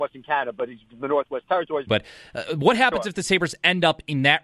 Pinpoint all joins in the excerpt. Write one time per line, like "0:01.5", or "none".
0:01.9